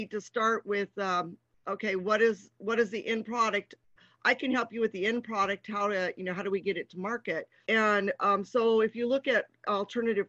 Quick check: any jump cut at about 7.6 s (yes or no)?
yes